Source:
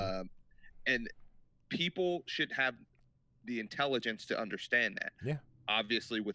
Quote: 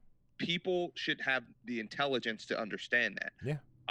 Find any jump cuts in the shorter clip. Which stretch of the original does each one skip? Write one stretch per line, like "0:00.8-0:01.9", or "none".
0:02.9-0:03.3